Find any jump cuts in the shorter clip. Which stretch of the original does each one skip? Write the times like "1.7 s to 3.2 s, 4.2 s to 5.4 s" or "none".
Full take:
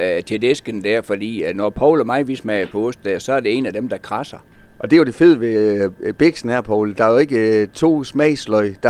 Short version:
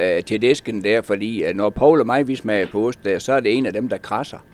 none